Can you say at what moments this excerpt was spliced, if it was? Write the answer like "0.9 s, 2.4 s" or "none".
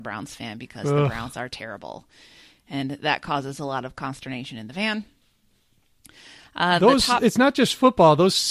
none